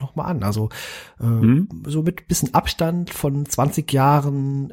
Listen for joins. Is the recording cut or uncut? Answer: uncut